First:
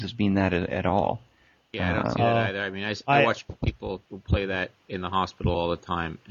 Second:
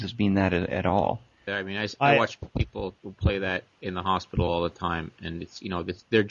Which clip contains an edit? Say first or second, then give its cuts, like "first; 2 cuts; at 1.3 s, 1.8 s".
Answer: second; 1 cut; at 1.5 s